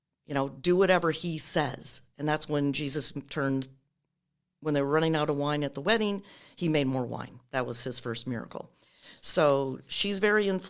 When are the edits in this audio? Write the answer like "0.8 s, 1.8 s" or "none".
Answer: none